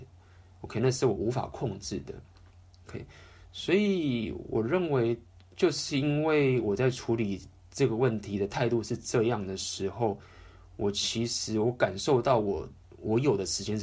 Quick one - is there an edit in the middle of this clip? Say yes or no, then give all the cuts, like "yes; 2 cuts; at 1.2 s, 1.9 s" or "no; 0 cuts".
no; 0 cuts